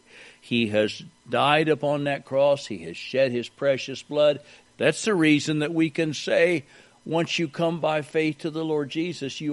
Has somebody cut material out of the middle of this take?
yes; 1 cut; at 4.7 s

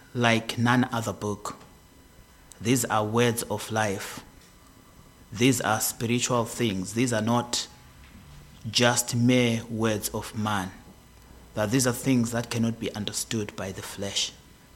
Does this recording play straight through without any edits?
yes; 0 cuts

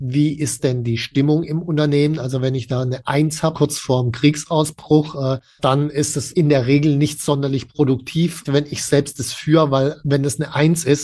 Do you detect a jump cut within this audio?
yes; 2 cuts; at 3.5 s, 8.4 s

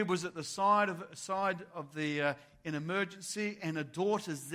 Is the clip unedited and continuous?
yes; 0 cuts

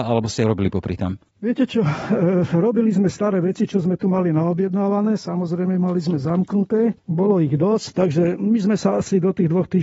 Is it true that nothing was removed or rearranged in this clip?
yes; 0 cuts

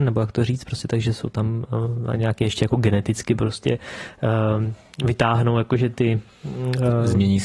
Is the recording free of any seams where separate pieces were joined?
yes; 0 cuts

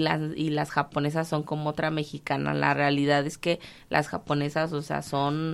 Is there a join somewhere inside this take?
no; 0 cuts

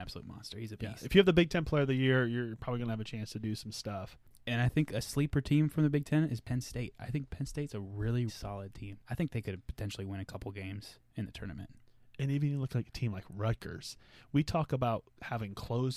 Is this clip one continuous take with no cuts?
no; 1 cut; at 8.3 s

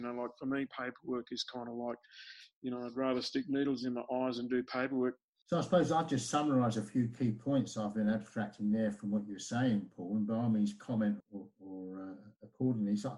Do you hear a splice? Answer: yes; 2 cuts; at 5.4 s, 11.2 s

